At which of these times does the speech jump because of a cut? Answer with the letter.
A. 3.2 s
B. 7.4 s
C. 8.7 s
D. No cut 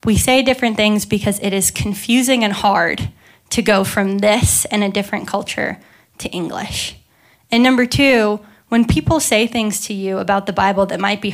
D